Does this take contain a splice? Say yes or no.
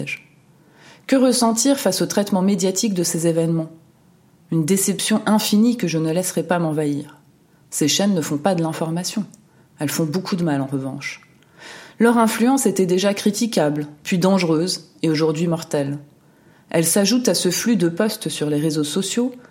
yes